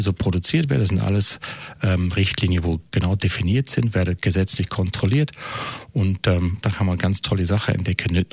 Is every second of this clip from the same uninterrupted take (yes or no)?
no